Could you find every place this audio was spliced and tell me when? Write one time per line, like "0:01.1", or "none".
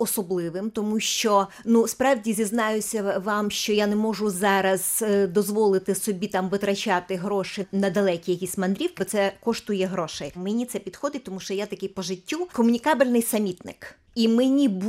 0:09.0
0:10.3